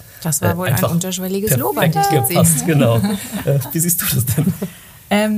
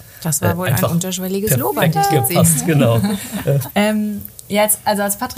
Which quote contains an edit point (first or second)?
second